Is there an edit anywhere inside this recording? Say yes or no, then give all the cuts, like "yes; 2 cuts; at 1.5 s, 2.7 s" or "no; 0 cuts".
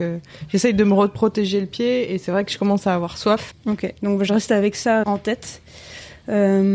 yes; 2 cuts; at 3.5 s, 5.0 s